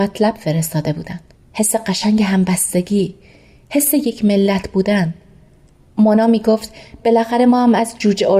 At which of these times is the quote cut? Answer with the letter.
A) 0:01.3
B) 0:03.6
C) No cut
A